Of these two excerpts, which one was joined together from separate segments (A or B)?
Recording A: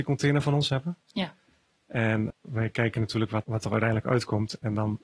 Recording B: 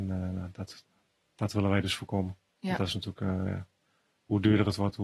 A